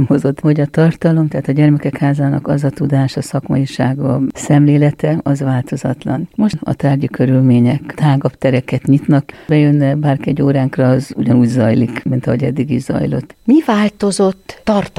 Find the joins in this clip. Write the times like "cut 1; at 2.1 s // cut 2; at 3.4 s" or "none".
cut 1; at 13.3 s